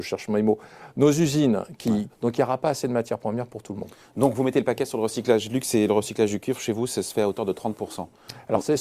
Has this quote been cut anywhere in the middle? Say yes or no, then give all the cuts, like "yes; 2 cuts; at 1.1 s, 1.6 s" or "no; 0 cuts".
yes; 1 cut; at 2.1 s